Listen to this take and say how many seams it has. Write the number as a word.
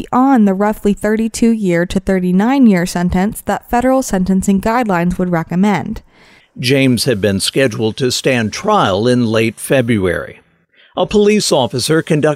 one